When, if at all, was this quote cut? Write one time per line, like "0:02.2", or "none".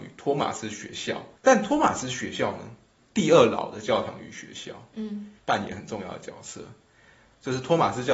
0:01.4
0:03.0
0:05.4